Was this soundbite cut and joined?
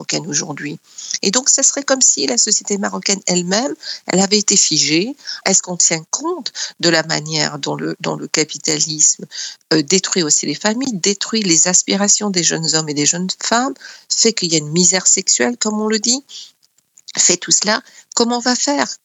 yes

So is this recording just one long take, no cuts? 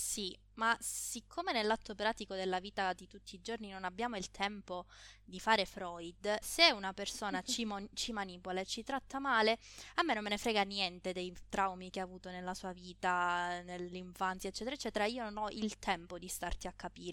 no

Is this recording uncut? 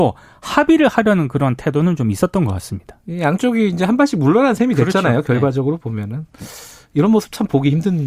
yes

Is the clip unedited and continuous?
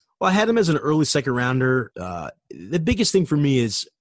no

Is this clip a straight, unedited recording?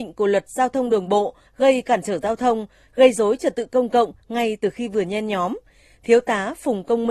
no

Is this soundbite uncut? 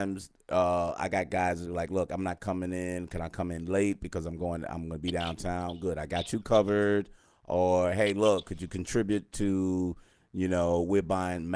yes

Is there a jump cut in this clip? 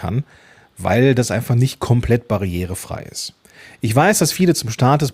no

